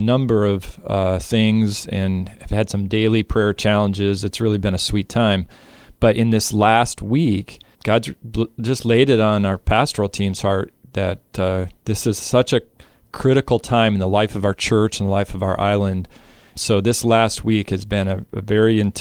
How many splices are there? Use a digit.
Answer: 1